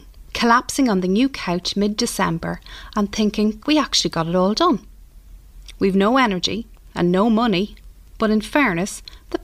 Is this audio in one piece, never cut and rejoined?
no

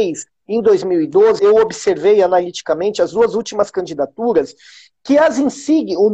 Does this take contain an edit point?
yes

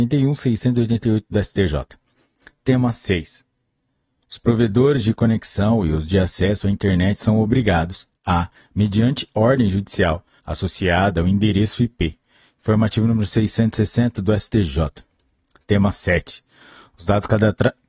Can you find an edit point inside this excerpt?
yes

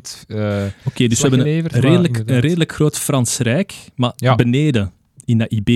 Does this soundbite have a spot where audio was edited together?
no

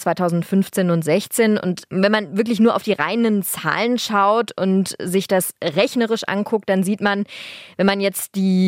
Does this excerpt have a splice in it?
no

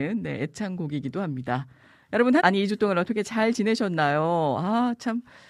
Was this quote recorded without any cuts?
no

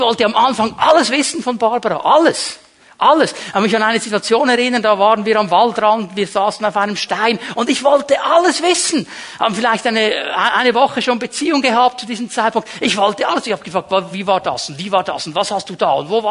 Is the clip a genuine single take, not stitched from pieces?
yes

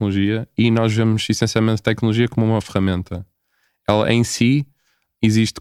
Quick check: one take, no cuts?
yes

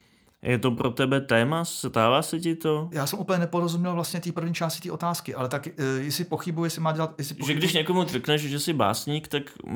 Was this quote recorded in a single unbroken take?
no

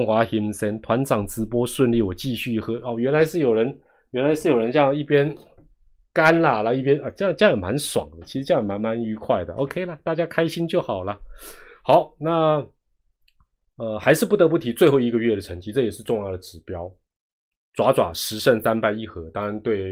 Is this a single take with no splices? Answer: yes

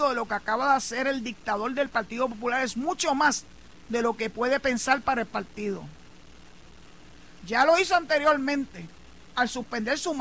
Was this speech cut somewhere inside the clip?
yes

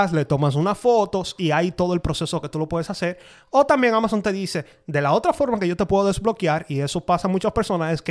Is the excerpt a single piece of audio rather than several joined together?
yes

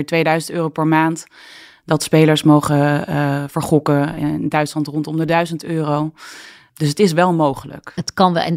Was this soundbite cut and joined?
no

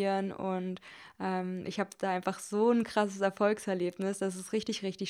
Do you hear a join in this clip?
no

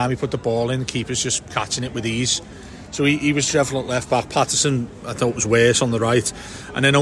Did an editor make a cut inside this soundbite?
no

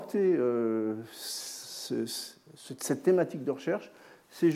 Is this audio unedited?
yes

